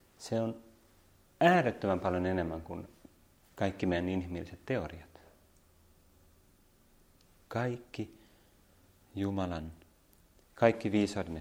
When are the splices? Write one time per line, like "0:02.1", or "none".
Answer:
none